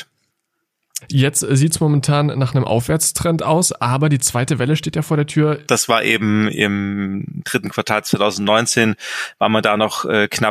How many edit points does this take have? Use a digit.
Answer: 2